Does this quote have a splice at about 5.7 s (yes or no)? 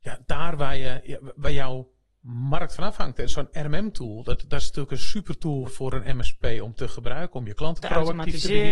yes